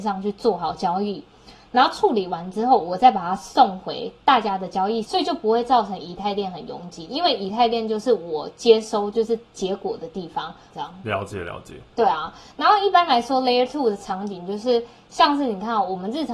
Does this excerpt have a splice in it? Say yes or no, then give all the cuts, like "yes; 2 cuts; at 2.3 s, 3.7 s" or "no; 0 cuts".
yes; 3 cuts; at 5.0 s, 10.7 s, 11.9 s